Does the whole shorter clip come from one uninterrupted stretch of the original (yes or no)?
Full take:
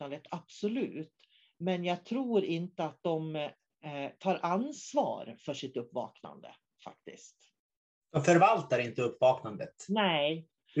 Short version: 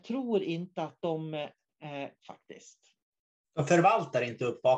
no